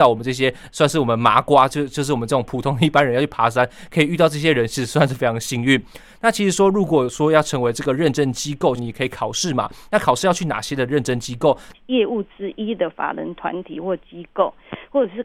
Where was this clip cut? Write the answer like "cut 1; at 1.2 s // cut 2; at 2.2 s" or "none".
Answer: cut 1; at 8.8 s // cut 2; at 11.7 s